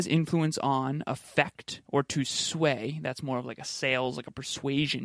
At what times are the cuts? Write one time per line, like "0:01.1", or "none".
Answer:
none